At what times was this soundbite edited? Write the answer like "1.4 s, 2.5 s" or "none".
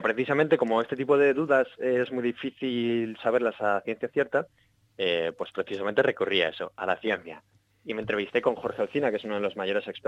none